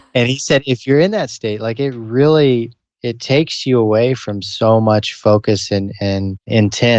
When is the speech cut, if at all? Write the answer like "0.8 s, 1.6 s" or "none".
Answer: none